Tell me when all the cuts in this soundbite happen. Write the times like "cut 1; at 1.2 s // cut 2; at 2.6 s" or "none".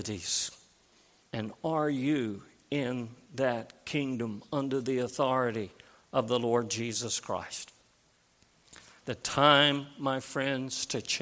cut 1; at 1.3 s // cut 2; at 9.0 s